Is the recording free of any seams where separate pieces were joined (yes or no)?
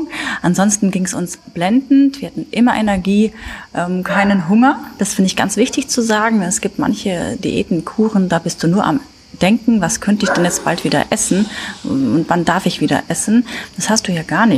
yes